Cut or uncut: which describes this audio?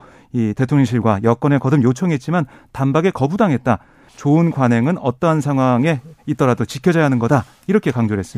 cut